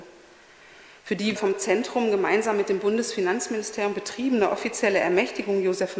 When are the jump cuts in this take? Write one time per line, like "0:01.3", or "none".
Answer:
0:01.4

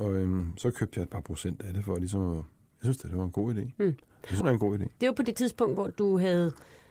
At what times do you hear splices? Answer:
0:04.4

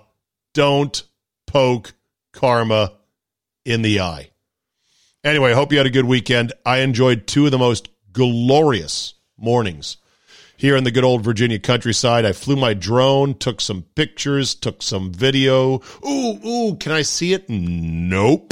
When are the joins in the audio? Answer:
none

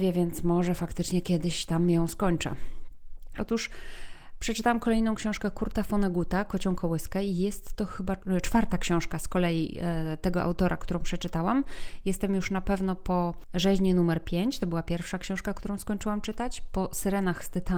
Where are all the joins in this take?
0:03.4

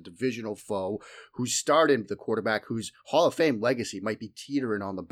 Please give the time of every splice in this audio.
0:02.0

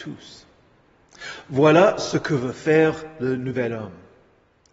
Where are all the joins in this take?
none

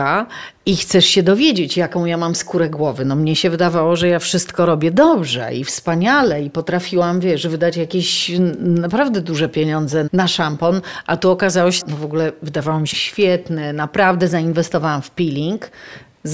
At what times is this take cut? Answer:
0:10.1
0:11.8
0:12.9

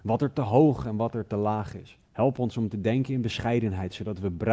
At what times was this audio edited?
0:02.1

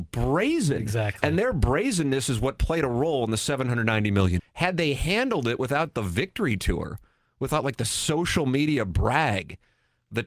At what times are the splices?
0:04.4

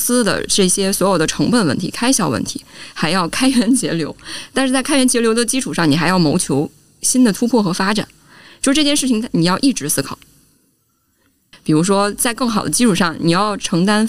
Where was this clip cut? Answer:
0:11.5

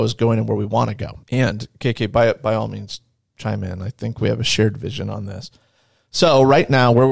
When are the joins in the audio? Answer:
0:01.2

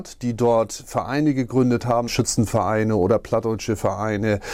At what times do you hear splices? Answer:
0:02.1

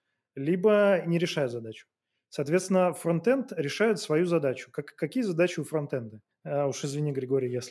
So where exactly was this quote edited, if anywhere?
0:06.3

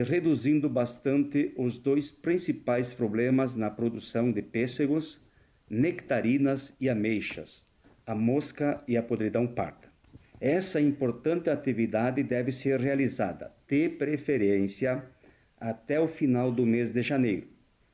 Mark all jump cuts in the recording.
0:10.2

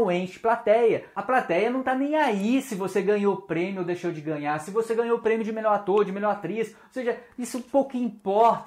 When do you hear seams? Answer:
none

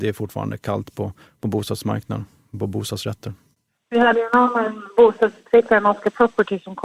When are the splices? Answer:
none

